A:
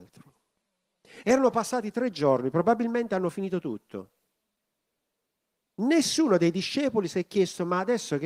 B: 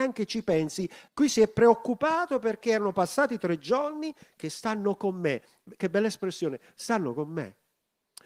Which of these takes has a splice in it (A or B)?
B